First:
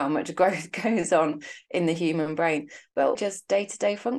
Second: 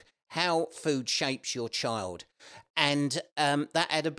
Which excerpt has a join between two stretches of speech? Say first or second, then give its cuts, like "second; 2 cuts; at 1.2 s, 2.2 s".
first; 1 cut; at 3.2 s